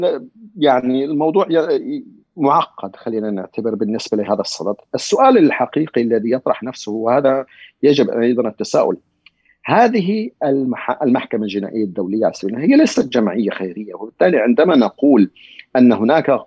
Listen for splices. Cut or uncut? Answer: uncut